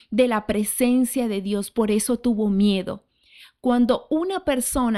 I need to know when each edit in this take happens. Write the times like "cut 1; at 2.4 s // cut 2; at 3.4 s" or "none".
none